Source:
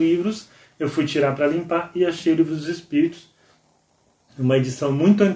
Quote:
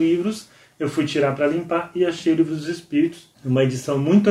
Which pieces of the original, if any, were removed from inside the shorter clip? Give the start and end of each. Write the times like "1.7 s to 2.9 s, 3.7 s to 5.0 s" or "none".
3.3 s to 4.3 s